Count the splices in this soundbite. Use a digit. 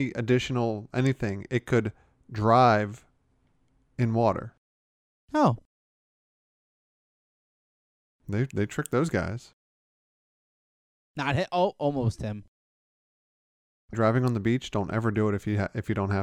1